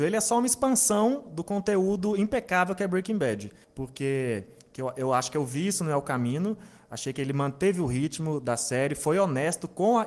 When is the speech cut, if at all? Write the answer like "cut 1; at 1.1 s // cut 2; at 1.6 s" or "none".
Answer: cut 1; at 3.6 s